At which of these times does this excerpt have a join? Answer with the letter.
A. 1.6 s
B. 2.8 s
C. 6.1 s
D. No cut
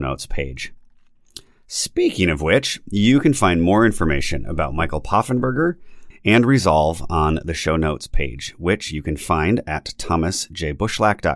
C